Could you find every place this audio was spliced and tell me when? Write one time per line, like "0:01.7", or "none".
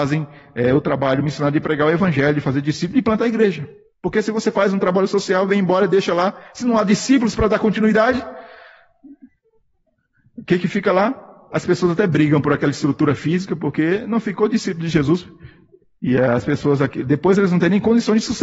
none

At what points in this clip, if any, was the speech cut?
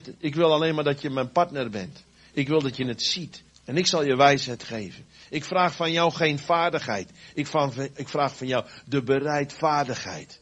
0:03.5

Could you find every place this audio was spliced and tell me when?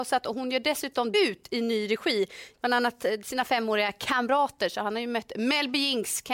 0:01.1
0:02.5

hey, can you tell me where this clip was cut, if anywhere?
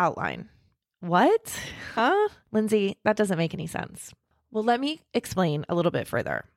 none

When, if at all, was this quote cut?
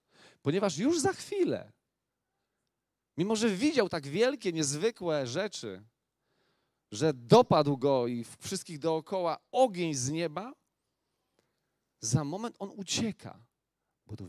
none

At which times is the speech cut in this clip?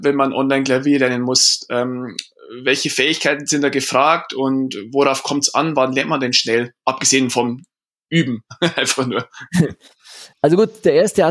0:10.3

